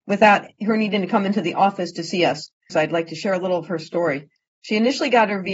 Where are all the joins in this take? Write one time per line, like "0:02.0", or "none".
0:02.7